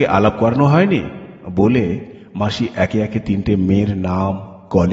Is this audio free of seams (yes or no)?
yes